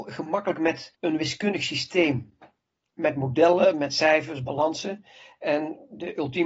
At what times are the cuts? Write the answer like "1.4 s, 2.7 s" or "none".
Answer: none